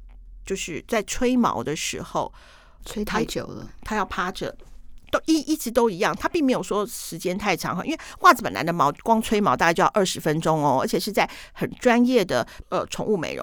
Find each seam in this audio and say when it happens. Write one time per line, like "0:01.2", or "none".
0:02.8